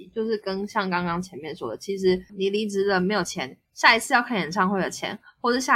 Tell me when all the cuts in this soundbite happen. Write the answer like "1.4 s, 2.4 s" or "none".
2.3 s, 3.6 s